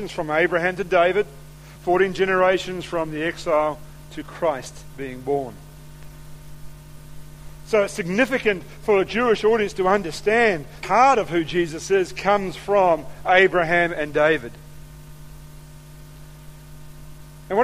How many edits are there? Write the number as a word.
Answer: two